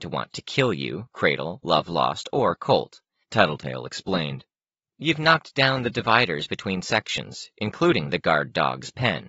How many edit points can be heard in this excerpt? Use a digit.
1